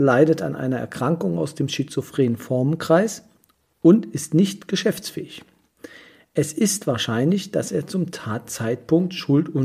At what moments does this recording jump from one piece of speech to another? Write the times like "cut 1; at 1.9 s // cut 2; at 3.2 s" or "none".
none

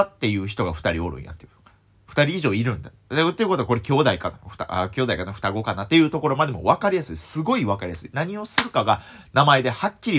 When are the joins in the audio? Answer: none

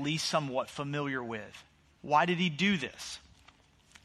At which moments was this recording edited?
cut 1; at 2.0 s

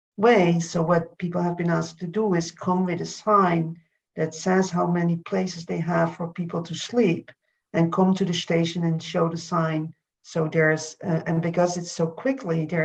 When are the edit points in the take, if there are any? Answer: cut 1; at 10.1 s

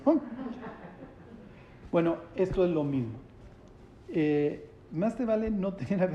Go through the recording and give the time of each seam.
cut 1; at 4.9 s

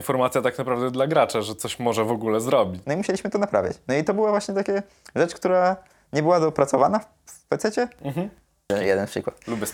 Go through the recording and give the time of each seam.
cut 1; at 2.8 s // cut 2; at 8.7 s

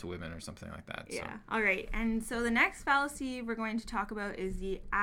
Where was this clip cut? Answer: cut 1; at 1.5 s

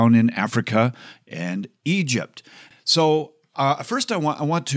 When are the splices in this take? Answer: cut 1; at 2.7 s

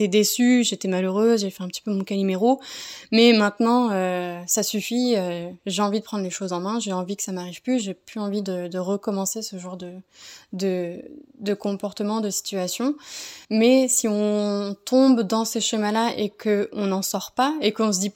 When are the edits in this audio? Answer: cut 1; at 13.4 s

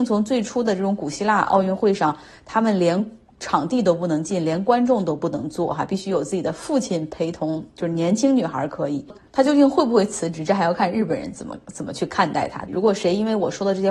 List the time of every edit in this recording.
cut 1; at 9.2 s // cut 2; at 12.7 s

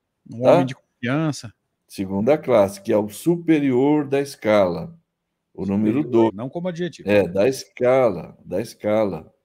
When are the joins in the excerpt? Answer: cut 1; at 1.8 s // cut 2; at 6.3 s

